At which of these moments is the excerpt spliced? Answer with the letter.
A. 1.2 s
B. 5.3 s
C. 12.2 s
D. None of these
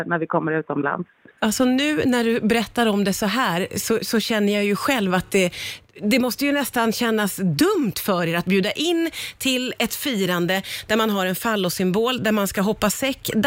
D